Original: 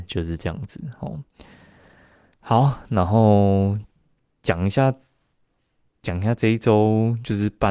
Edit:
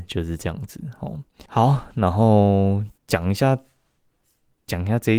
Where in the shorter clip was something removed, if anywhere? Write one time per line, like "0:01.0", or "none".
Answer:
0:01.5
0:03.0